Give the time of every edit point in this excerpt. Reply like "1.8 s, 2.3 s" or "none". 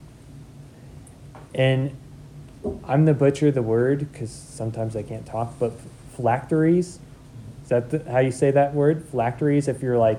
none

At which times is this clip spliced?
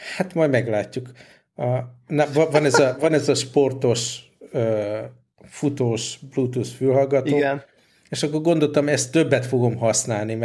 none

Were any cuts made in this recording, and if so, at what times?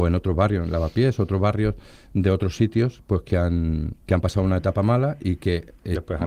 4.0 s

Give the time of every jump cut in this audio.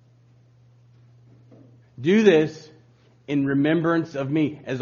1.8 s

